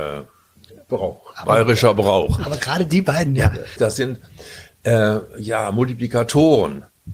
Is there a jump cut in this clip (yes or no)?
yes